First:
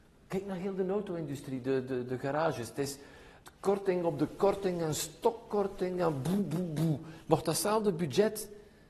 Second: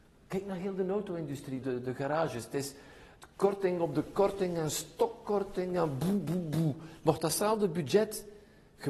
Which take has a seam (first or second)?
second